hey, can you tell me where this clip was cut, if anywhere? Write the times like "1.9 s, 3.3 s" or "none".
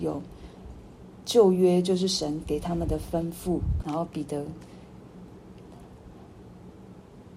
3.8 s